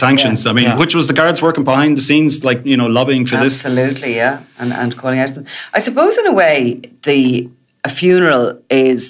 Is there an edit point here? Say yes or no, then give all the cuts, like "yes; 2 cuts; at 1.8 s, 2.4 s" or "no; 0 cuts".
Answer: no; 0 cuts